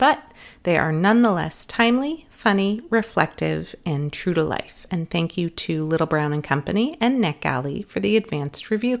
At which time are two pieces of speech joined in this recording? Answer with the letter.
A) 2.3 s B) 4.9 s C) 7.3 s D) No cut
B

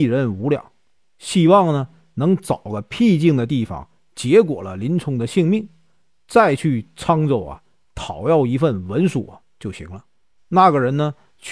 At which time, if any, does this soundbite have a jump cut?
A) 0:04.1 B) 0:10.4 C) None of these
B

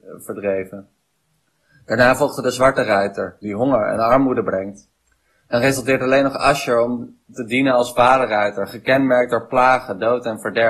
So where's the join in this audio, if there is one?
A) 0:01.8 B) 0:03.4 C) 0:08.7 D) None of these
B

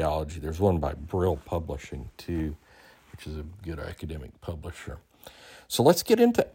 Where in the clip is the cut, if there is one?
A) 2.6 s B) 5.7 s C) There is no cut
C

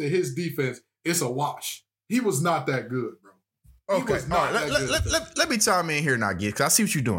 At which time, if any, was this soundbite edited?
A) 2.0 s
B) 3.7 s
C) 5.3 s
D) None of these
D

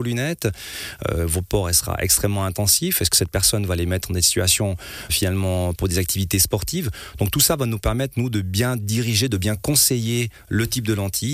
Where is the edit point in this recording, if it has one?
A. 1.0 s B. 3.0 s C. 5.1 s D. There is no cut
C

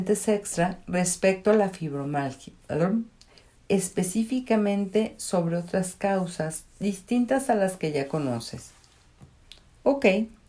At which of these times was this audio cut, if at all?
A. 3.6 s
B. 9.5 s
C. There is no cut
A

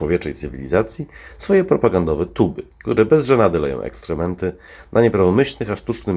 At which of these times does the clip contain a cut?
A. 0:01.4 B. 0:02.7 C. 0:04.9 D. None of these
B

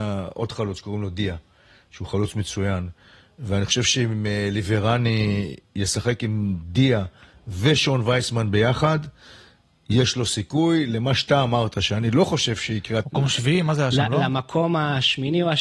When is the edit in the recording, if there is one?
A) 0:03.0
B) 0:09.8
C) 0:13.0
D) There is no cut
C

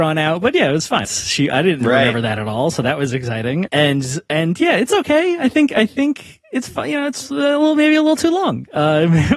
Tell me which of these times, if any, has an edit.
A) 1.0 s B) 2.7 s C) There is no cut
A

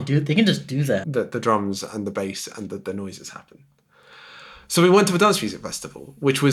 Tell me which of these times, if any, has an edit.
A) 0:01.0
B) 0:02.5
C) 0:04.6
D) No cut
A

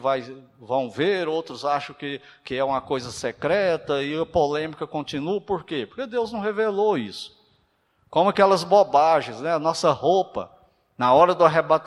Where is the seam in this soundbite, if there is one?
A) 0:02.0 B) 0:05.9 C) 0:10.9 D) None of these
D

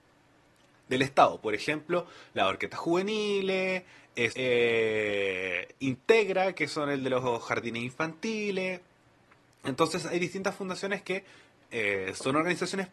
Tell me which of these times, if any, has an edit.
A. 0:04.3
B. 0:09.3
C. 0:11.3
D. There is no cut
A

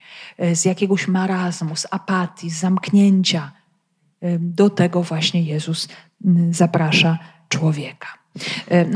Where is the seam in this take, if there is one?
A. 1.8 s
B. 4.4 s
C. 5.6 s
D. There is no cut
D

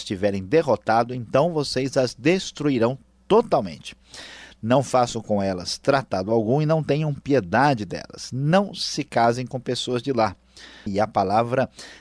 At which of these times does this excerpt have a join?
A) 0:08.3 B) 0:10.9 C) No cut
B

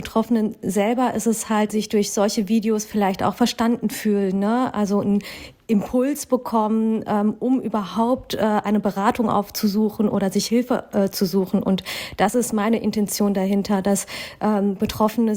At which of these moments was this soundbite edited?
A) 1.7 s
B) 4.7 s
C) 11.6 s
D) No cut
A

